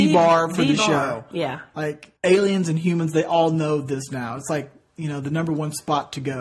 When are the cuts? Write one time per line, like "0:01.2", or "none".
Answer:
0:02.2